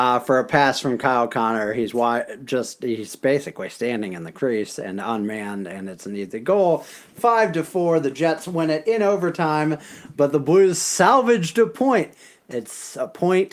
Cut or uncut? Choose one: uncut